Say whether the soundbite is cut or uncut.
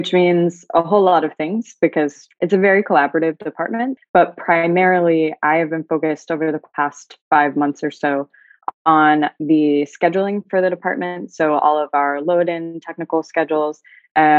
cut